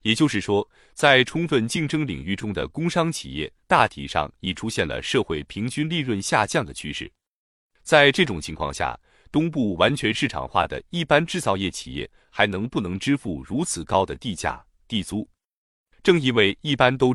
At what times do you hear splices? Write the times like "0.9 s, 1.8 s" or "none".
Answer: none